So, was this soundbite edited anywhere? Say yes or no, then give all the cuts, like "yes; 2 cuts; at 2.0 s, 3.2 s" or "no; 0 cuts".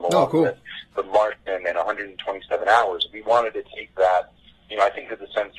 no; 0 cuts